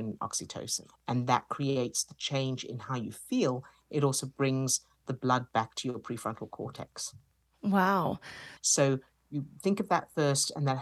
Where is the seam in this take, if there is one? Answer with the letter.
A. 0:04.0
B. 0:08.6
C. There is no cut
B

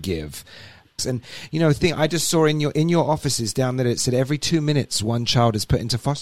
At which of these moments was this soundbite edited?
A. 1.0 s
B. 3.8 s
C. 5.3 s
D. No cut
A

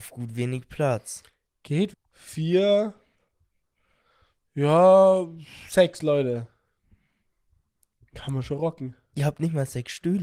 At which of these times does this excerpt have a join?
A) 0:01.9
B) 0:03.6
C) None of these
A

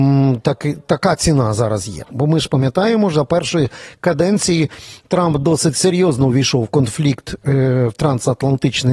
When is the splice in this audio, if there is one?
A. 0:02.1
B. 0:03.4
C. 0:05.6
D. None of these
A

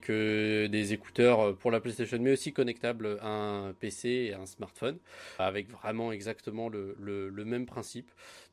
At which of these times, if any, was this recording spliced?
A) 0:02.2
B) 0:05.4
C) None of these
B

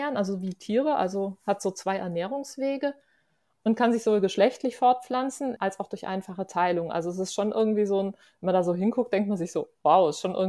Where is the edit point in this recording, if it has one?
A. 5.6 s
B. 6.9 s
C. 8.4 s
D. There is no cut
A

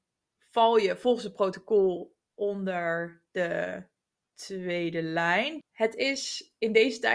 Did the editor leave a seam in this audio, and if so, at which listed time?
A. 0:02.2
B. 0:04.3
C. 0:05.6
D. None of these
C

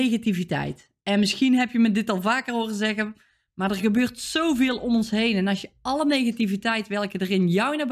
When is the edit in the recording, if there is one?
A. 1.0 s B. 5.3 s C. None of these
C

